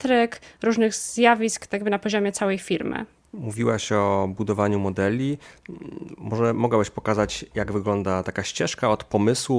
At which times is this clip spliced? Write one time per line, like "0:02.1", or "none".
none